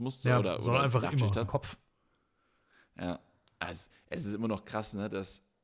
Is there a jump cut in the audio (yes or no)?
yes